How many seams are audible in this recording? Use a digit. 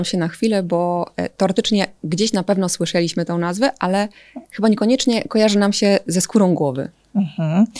0